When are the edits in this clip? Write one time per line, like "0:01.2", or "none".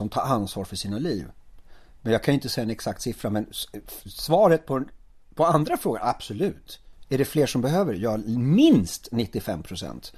none